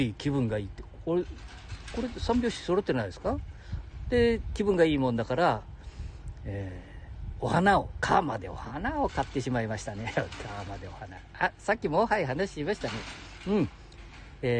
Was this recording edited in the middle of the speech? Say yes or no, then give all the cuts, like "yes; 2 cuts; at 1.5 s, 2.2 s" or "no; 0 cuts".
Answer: no; 0 cuts